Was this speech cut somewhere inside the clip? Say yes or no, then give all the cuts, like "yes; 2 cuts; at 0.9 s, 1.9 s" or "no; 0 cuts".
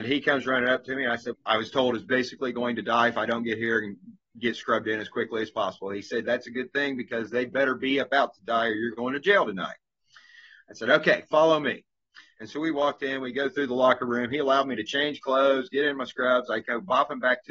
yes; 1 cut; at 1.3 s